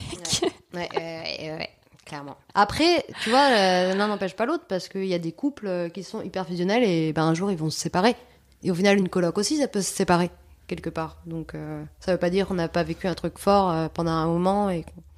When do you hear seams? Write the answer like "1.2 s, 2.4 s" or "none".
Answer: none